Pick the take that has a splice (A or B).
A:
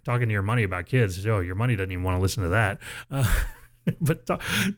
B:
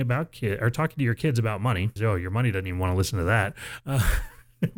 B